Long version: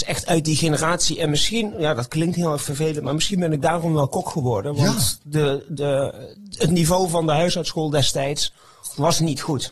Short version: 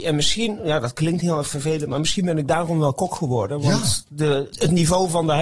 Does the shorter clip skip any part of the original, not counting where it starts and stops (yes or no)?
yes